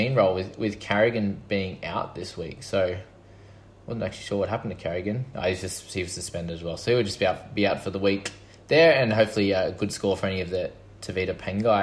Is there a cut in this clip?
no; 0 cuts

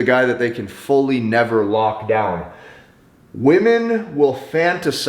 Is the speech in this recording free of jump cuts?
yes; 0 cuts

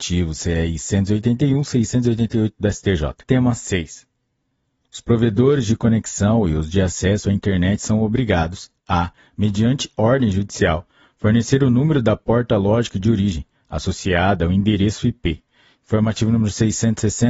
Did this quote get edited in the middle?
yes; 1 cut; at 3.2 s

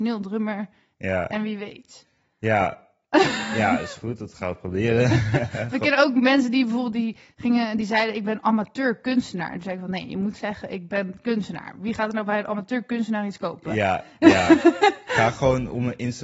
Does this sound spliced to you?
no; 0 cuts

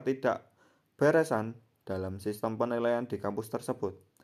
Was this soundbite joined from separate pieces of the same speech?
no; 0 cuts

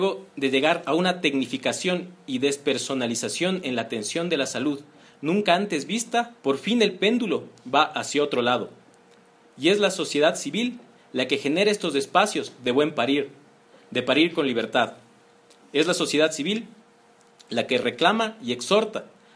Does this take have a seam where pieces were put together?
yes; 1 cut; at 6.4 s

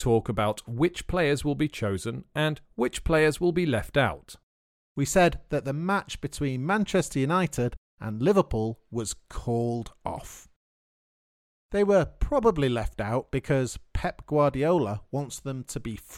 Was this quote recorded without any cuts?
no; 2 cuts; at 4.8 s, 11.5 s

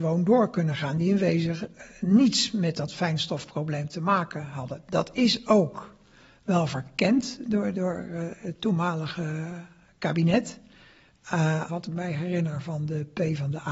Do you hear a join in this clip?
yes; 3 cuts; at 1.9 s, 7.7 s, 11.7 s

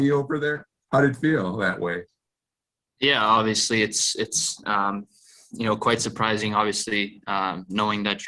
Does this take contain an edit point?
no; 0 cuts

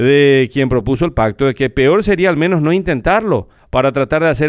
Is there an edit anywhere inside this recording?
no; 0 cuts

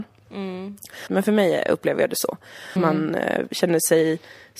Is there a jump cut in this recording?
yes; 2 cuts; at 1.1 s, 2.8 s

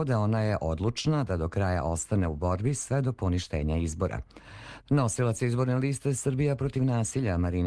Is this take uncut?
no; 1 cut; at 4.8 s

